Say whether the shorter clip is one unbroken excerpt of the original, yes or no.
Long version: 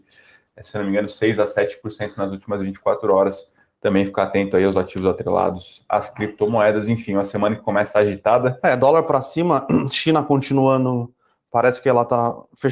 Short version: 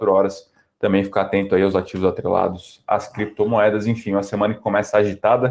yes